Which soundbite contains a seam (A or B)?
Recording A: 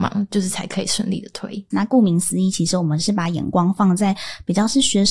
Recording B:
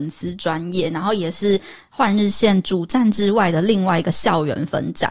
A